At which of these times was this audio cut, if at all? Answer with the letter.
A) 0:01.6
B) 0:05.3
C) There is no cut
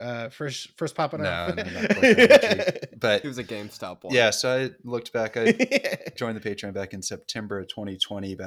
C